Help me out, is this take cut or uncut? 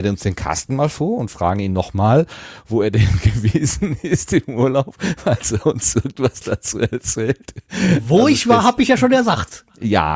uncut